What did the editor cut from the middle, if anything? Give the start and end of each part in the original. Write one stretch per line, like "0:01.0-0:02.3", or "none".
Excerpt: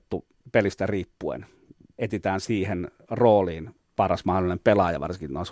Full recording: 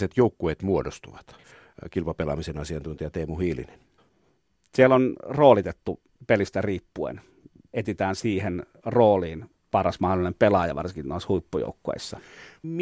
none